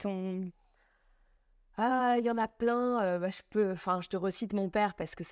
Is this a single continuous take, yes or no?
yes